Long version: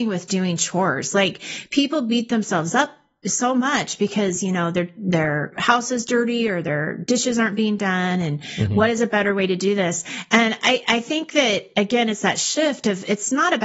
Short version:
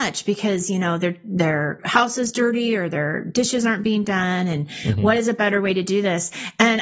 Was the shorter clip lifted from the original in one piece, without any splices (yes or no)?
yes